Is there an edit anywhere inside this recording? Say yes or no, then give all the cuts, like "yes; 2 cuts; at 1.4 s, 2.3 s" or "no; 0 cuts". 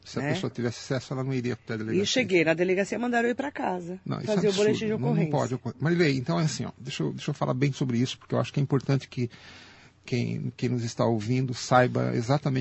no; 0 cuts